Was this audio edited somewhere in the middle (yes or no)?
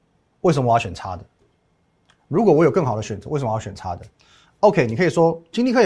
no